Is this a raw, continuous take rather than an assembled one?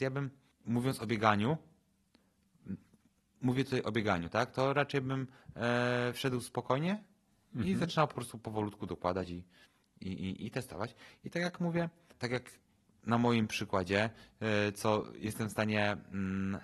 yes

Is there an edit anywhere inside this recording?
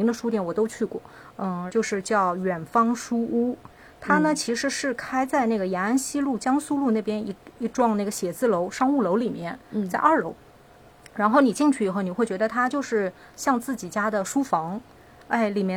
yes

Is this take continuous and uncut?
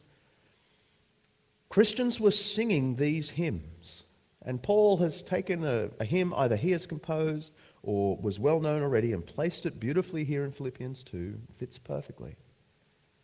yes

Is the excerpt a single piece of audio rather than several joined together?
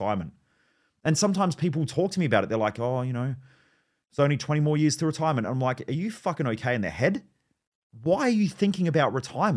yes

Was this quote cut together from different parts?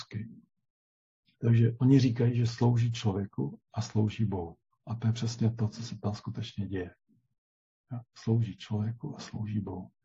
no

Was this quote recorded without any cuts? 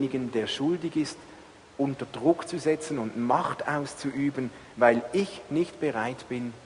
yes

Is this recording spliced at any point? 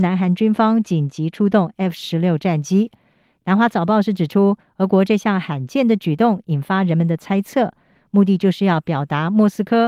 no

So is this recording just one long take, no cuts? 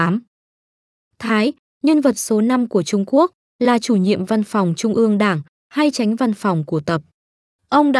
yes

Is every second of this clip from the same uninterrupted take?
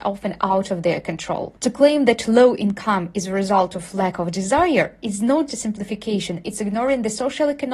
no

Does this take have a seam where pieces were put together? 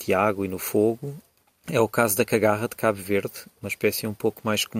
no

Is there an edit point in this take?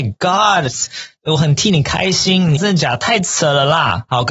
yes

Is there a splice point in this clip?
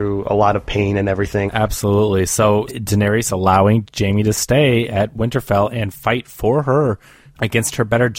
yes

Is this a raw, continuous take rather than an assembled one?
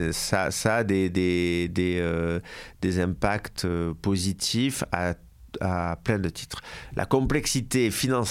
yes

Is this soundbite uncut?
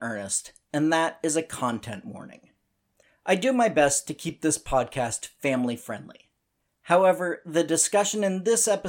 yes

